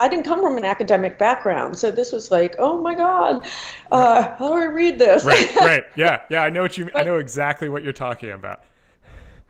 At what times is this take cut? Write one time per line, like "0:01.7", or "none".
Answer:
none